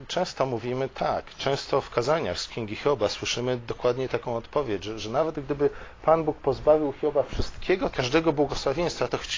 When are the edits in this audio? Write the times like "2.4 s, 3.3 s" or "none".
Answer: 7.9 s